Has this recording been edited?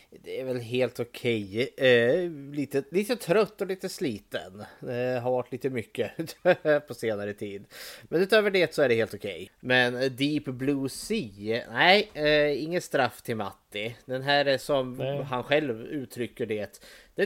yes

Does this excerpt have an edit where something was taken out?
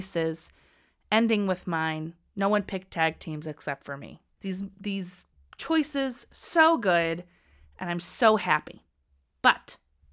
yes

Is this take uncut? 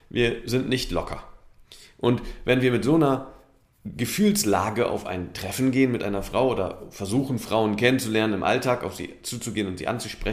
yes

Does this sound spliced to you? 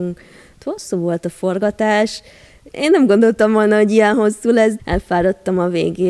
yes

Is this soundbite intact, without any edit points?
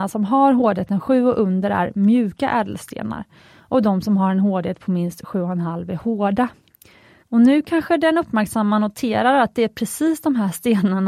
no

